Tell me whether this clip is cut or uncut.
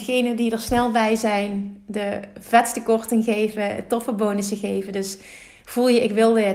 uncut